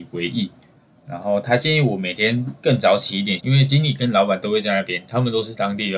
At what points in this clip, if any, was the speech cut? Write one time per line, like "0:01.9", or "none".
0:01.0
0:03.4

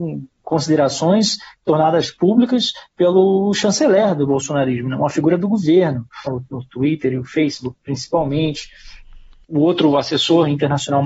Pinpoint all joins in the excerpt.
0:06.3
0:09.4

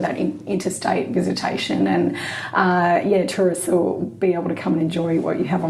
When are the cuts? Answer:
0:04.0

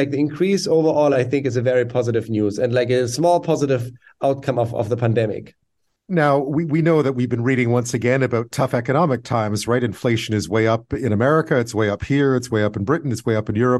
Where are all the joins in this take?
none

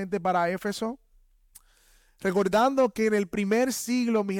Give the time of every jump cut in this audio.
none

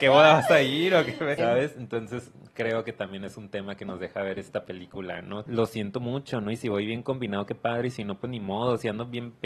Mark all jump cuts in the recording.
0:01.4
0:05.5

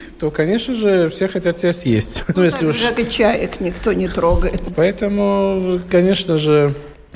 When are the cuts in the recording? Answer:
0:02.3
0:04.7

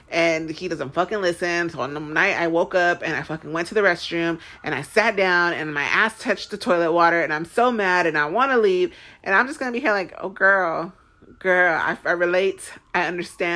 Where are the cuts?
none

